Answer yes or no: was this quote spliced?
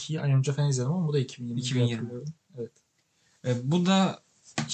no